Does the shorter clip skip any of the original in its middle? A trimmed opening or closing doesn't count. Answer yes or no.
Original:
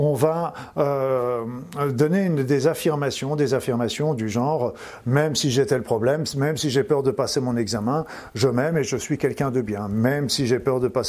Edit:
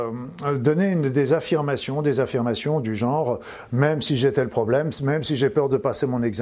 no